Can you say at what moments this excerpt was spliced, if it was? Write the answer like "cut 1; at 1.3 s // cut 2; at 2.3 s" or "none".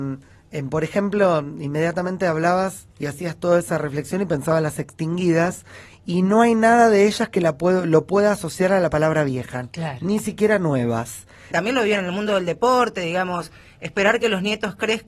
cut 1; at 2.9 s // cut 2; at 11.5 s

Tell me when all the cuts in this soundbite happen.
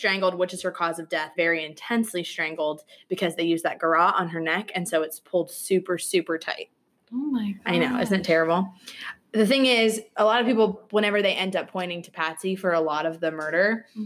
cut 1; at 1.3 s

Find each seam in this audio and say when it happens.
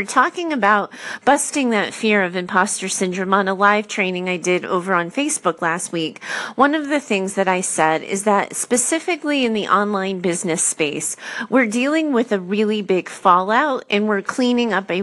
none

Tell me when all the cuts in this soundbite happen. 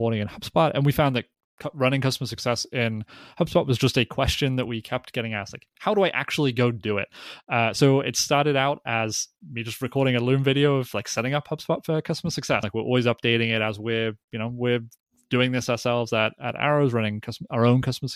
cut 1; at 12.6 s

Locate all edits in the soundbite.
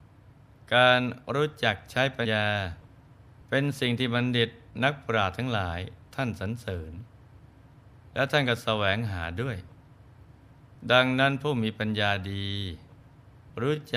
cut 1; at 2.2 s

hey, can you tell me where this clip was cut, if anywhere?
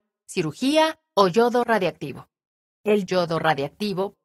cut 1; at 2.7 s

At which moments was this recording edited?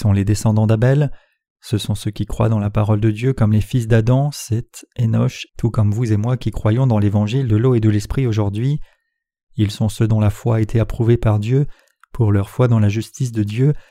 cut 1; at 5.5 s

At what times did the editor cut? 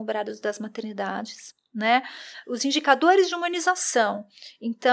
none

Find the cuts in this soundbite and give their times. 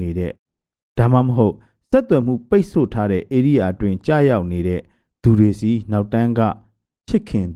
none

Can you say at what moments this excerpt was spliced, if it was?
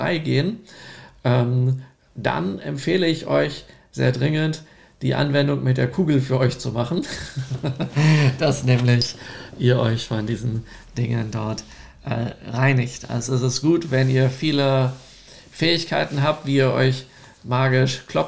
none

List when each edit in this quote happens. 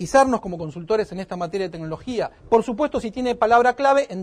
cut 1; at 2.4 s

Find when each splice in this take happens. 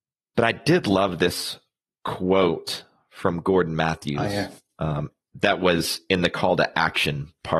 none

